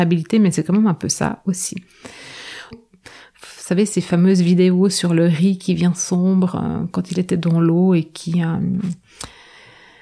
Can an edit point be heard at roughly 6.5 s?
no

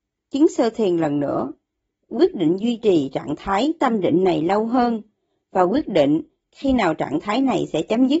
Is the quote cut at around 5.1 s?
no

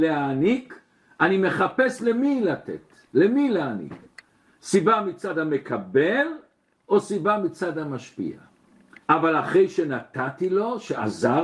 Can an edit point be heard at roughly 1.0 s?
no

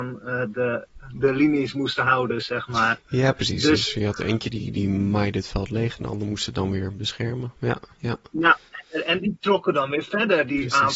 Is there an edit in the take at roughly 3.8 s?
no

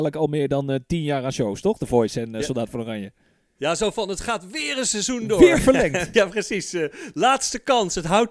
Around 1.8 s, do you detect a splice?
no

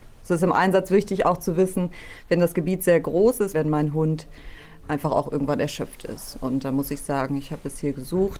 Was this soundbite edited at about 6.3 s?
no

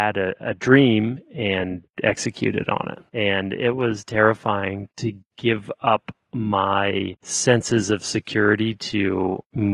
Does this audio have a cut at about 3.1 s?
yes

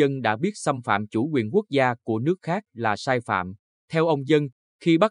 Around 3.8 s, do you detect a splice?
yes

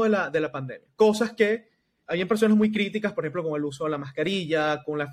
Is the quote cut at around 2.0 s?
yes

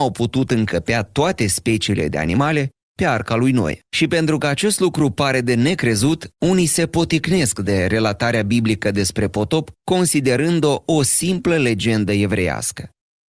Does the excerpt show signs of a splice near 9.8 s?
yes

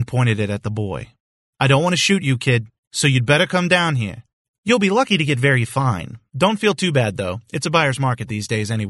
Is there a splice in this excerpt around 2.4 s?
no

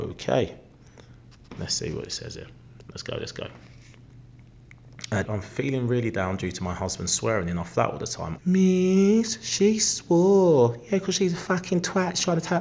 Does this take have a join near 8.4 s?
yes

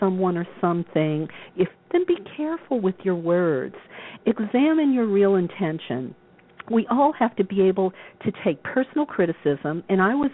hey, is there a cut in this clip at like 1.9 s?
yes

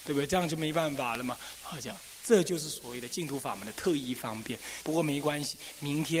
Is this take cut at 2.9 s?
no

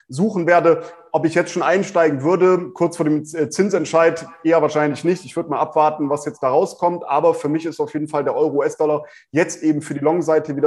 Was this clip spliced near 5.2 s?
no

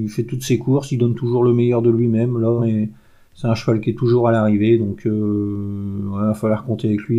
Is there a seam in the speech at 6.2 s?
no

